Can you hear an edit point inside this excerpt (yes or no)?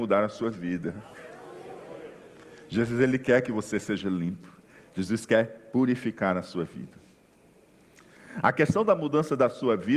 no